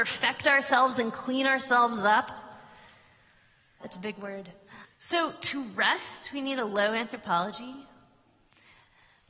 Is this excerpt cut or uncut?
cut